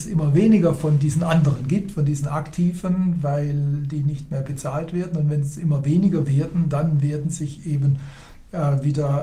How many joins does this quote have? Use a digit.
0